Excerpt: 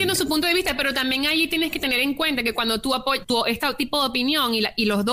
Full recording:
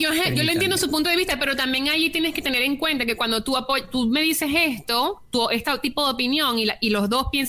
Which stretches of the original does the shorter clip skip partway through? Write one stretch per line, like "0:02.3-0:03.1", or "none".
0:03.9-0:05.3